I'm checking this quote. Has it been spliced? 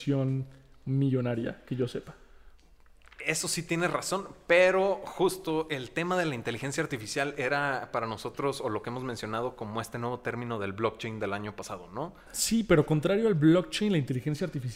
yes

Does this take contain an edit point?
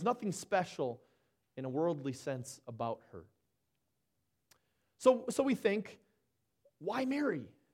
no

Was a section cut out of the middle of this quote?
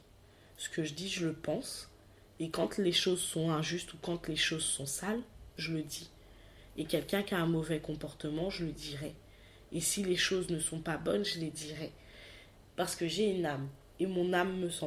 yes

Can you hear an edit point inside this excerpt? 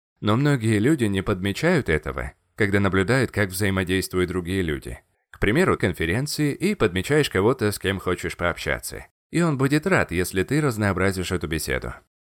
yes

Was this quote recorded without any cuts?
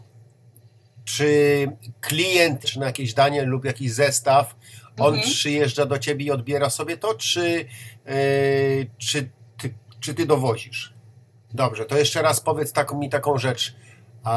no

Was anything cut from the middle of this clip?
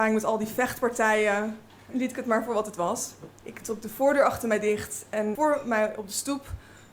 yes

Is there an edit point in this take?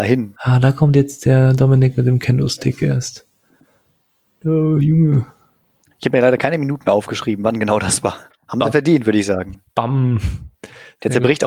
yes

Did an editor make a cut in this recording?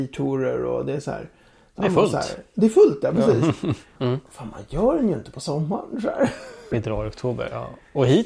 yes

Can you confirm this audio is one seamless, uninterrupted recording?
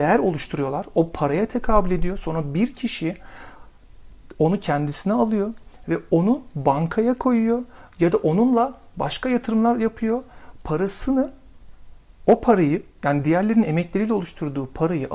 yes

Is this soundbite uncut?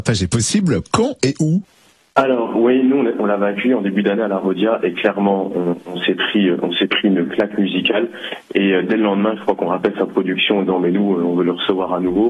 yes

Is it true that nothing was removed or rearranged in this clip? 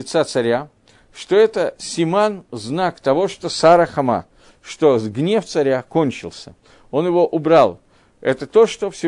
yes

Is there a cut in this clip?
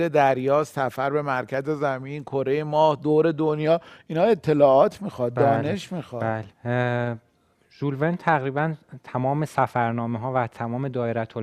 yes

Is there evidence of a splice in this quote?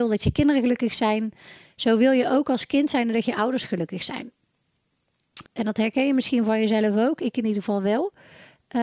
yes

